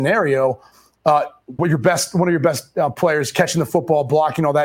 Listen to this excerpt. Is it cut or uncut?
cut